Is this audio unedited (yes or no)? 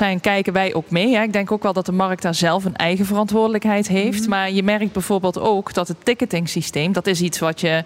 yes